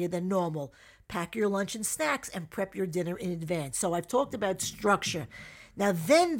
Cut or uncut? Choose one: uncut